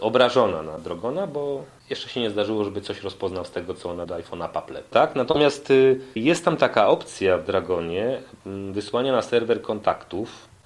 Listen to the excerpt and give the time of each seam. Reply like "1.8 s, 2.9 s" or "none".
none

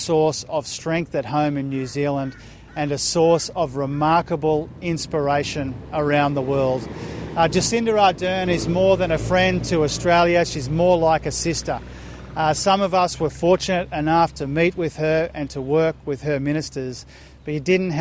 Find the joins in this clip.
none

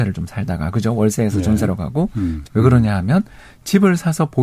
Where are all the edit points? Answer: 2.4 s

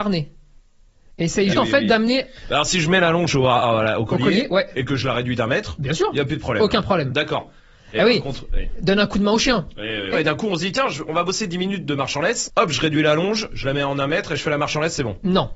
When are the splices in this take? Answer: 1.5 s, 10.1 s, 12.5 s

